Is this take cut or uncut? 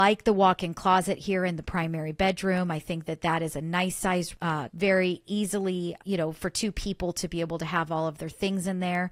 cut